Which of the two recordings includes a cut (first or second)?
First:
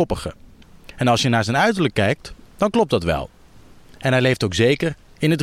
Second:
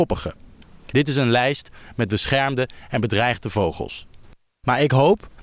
second